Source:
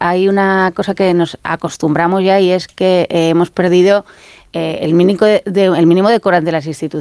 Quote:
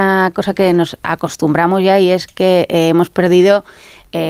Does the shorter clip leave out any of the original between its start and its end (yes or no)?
no